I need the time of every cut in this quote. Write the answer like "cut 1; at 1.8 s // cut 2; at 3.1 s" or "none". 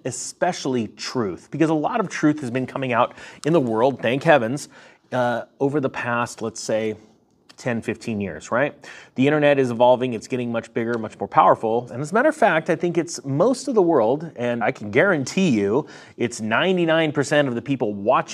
cut 1; at 11.9 s // cut 2; at 14.6 s